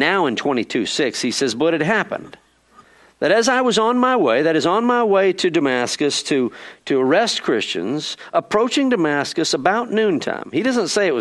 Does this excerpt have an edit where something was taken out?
no; 0 cuts

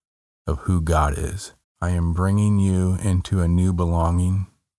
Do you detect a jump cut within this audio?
yes; 1 cut; at 1.6 s

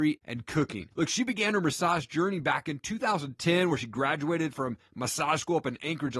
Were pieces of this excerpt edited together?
no; 0 cuts

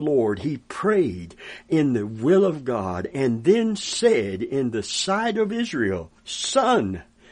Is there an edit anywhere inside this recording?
yes; 1 cut; at 6.2 s

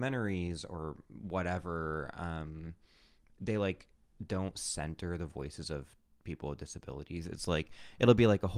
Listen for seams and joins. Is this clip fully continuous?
yes; 0 cuts

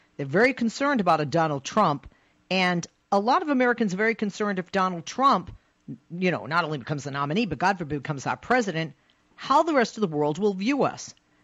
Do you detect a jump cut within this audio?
no; 0 cuts

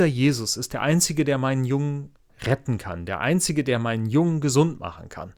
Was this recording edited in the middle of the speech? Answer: no; 0 cuts

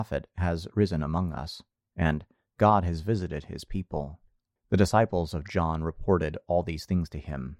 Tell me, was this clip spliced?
yes; 1 cut; at 4.6 s

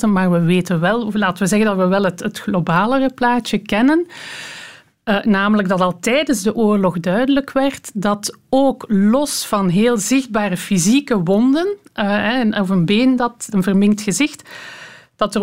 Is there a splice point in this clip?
yes; 1 cut; at 13.5 s

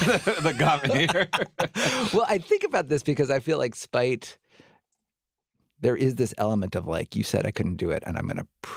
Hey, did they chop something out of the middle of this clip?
no; 0 cuts

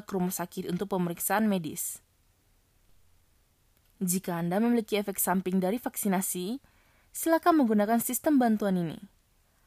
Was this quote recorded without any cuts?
yes; 0 cuts

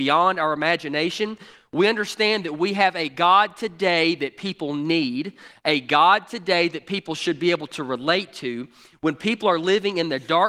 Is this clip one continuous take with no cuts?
yes; 0 cuts

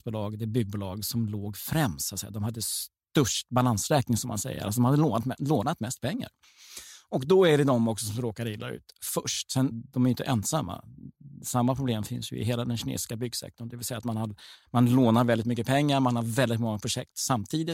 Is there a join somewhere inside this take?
yes; 1 cut; at 9.7 s

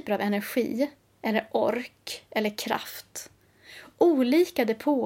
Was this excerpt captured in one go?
yes; 0 cuts

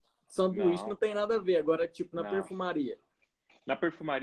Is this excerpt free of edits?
yes; 0 cuts

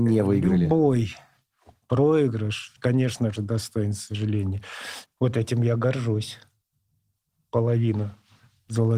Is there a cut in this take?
yes; 2 cuts; at 2.8 s, 5.1 s

